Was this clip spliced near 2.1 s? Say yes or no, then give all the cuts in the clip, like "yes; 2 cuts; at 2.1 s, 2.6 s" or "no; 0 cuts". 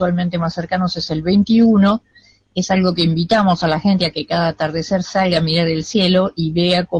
no; 0 cuts